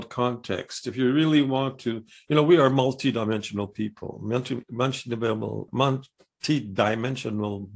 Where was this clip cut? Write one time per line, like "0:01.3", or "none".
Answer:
0:05.7